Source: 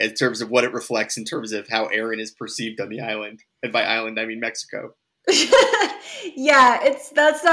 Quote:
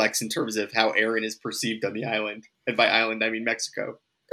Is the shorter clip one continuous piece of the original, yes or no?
yes